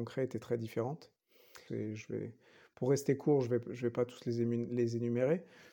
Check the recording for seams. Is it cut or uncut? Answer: cut